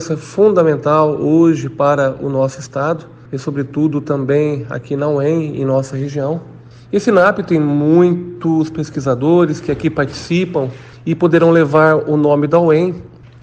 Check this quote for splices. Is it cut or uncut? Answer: cut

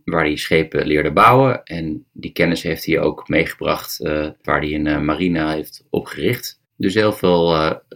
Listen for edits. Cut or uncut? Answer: cut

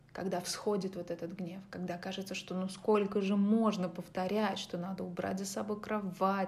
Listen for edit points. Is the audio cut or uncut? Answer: uncut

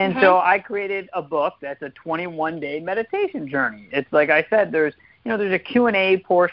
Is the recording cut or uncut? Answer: uncut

